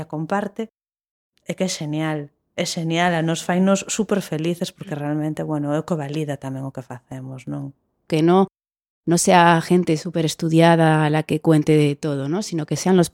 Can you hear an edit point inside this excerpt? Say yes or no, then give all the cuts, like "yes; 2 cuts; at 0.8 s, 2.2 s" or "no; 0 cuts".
yes; 1 cut; at 8.1 s